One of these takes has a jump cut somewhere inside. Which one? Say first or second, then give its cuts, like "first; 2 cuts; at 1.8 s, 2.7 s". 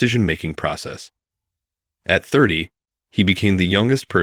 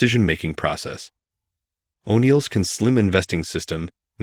second; 1 cut; at 1.9 s